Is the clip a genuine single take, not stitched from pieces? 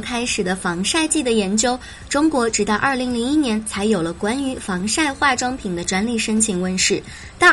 yes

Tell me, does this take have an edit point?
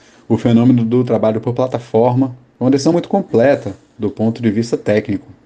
no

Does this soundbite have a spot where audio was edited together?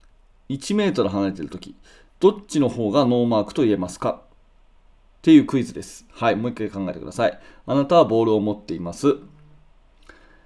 no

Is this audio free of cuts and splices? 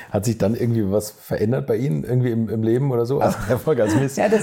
no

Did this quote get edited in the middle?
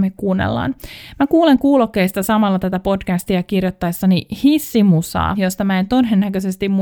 yes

